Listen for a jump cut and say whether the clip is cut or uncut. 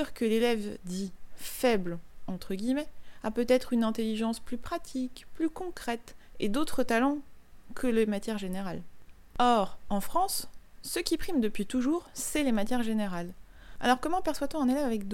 cut